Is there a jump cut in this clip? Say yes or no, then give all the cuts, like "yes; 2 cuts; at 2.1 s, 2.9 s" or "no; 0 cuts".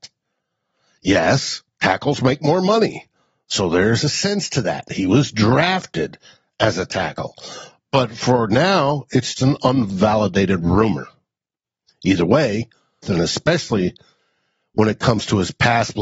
yes; 2 cuts; at 9.4 s, 13.0 s